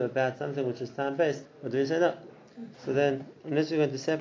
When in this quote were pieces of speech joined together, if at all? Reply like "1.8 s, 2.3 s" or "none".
1.5 s, 2.7 s